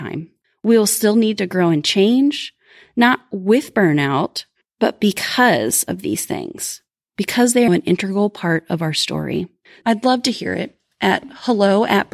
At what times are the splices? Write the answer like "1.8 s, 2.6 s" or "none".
7.7 s, 9.8 s